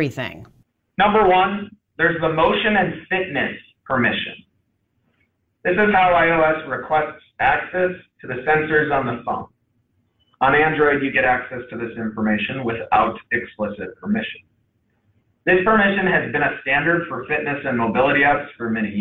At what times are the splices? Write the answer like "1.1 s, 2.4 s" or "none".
5.5 s